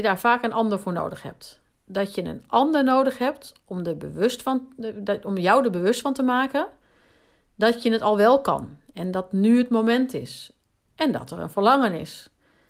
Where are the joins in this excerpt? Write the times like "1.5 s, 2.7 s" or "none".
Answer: none